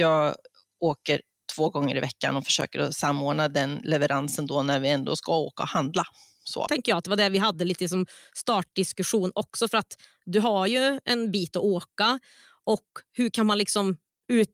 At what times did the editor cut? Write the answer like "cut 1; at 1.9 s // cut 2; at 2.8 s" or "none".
cut 1; at 6.7 s